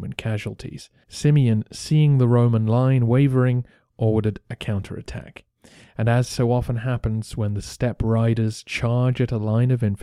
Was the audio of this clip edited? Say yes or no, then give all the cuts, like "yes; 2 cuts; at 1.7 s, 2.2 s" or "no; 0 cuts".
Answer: yes; 1 cut; at 1.0 s